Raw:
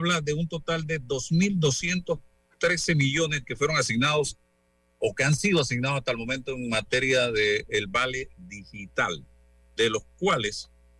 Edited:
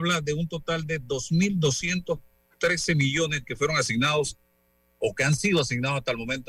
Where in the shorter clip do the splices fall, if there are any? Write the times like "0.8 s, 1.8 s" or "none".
none